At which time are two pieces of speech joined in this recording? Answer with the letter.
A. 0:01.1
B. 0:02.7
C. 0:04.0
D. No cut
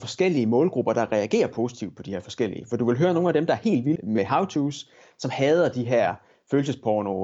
C